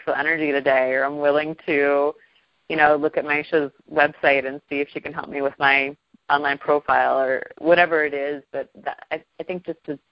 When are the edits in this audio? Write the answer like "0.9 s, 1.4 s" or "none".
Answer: none